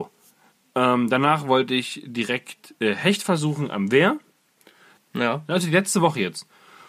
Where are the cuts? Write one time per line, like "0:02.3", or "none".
0:05.0